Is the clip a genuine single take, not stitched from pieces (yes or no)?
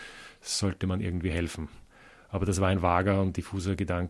yes